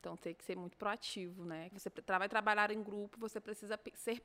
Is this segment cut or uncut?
cut